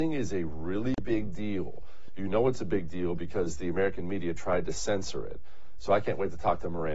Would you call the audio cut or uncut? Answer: uncut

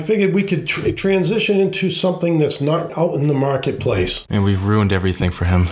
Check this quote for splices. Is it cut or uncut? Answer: cut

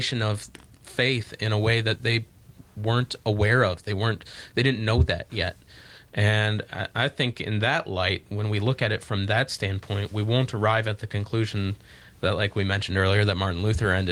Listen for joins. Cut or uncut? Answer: uncut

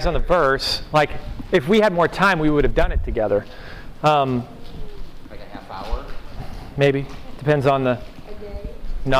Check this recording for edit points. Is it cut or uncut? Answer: uncut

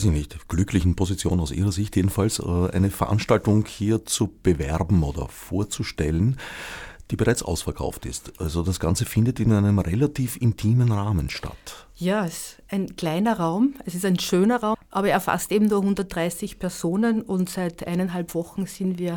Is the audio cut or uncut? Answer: cut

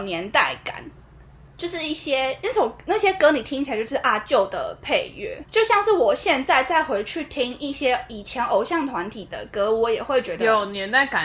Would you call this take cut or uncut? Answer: cut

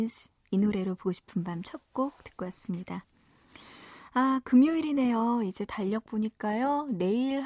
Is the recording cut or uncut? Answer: uncut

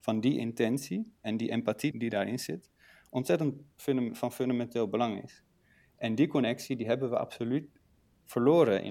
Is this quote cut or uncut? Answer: cut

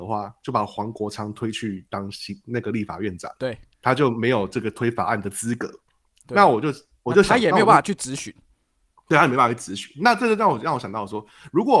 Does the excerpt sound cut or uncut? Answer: uncut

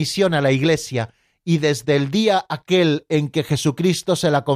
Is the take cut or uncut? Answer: uncut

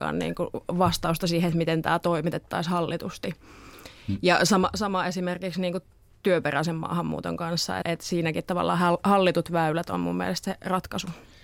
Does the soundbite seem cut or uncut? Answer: cut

